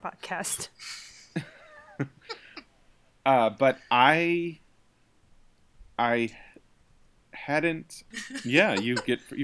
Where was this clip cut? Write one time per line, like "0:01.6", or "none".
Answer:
0:08.1

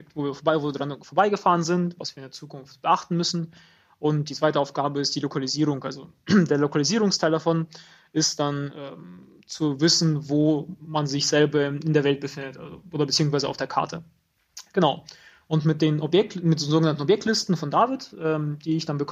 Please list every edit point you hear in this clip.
none

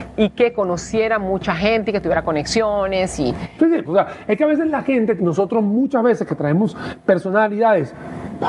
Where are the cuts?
0:03.8
0:05.2

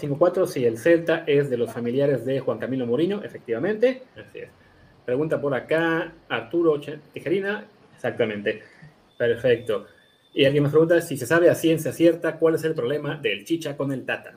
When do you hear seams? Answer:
0:04.1
0:07.8
0:09.1

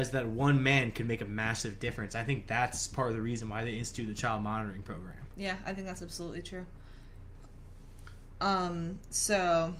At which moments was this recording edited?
none

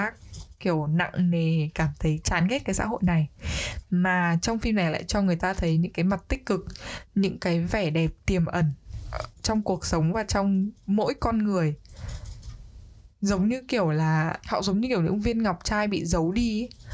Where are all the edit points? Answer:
0:14.4

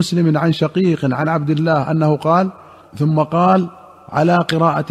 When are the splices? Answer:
0:02.8

